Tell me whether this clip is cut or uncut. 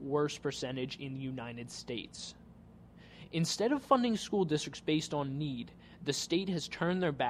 uncut